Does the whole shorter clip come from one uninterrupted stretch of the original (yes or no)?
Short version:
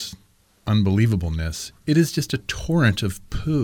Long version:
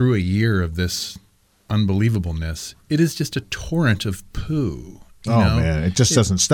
yes